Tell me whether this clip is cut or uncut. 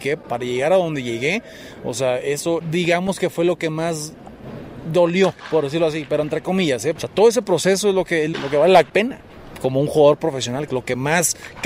cut